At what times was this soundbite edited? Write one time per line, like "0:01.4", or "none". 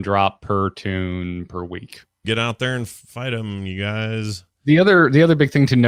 0:02.2